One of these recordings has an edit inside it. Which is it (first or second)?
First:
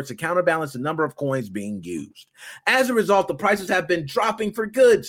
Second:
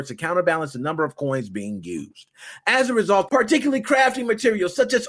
second